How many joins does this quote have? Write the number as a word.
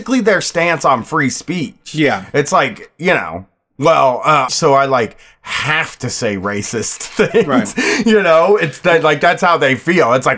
one